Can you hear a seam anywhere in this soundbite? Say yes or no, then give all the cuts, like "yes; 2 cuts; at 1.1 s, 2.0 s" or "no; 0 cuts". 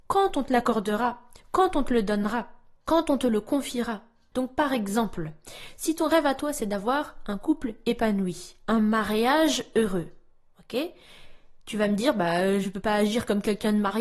yes; 1 cut; at 4.3 s